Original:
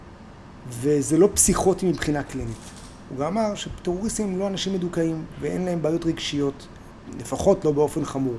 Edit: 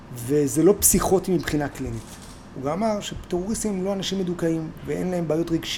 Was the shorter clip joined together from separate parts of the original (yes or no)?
no